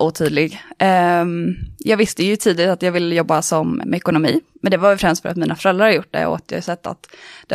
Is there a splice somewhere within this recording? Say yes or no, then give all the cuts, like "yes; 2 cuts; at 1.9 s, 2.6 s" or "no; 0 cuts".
yes; 1 cut; at 3.8 s